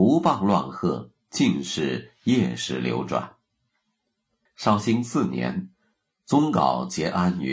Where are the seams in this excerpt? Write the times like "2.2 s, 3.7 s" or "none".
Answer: 4.5 s